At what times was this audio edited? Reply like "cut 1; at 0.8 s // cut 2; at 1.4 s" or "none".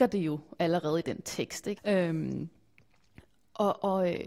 cut 1; at 1.8 s